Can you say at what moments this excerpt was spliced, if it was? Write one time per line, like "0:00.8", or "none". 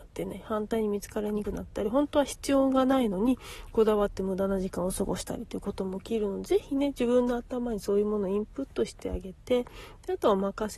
0:01.4